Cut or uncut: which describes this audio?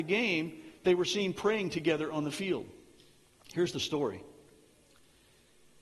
uncut